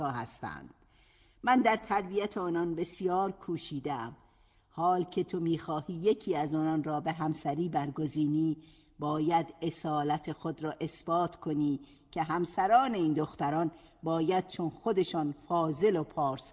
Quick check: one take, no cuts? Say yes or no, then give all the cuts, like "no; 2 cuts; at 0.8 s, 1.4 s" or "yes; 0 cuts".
yes; 0 cuts